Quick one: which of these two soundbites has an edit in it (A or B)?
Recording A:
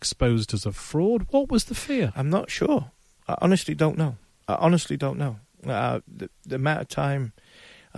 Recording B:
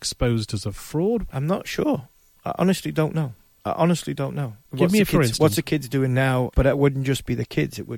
B